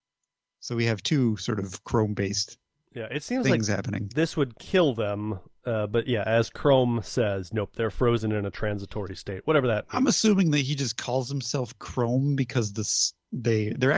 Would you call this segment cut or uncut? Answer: uncut